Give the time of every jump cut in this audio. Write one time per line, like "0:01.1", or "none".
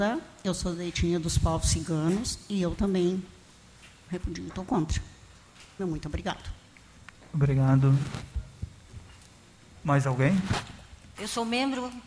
0:05.8
0:11.2